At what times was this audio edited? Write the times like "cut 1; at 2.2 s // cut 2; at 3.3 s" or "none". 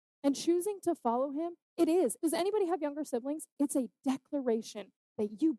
cut 1; at 2.2 s // cut 2; at 3.6 s